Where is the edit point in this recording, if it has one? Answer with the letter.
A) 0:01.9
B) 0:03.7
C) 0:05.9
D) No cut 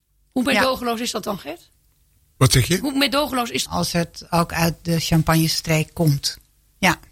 B